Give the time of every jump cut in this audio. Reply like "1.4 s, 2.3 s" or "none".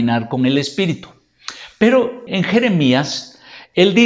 2.3 s